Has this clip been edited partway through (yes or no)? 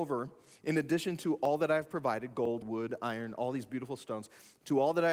yes